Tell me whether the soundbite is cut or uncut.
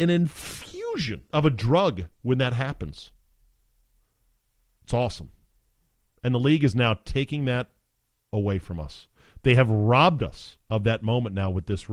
cut